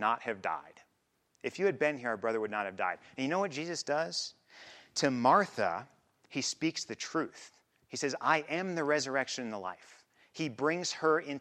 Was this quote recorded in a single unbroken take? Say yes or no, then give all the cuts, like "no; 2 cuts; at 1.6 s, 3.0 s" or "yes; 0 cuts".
yes; 0 cuts